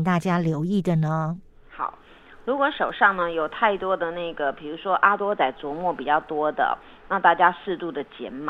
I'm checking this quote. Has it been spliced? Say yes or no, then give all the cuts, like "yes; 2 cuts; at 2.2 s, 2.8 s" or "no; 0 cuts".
no; 0 cuts